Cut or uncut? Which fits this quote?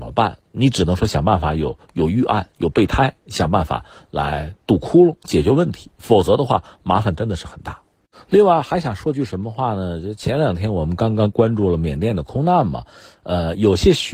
uncut